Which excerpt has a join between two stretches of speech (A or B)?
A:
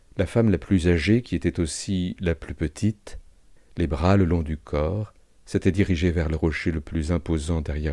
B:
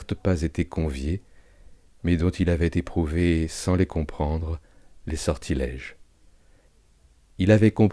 A